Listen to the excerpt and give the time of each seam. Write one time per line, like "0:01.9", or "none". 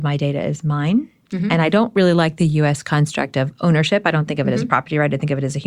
none